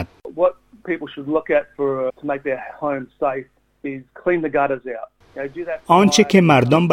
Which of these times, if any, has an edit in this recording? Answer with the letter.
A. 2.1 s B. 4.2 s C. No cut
A